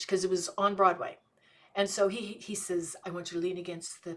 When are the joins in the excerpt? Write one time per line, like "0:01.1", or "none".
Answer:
0:03.0

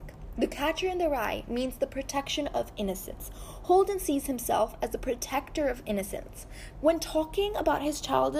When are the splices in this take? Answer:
0:06.7

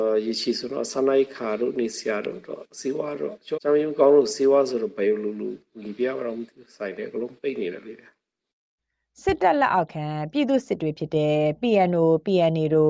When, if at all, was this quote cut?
0:03.6

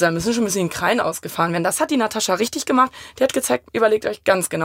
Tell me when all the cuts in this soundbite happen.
0:03.6

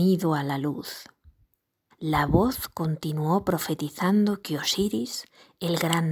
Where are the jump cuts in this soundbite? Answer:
0:01.9

